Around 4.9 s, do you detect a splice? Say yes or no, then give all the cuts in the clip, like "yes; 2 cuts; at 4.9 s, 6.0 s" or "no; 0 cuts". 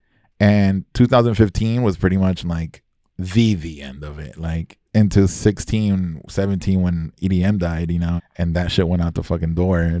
yes; 2 cuts; at 4.9 s, 8.2 s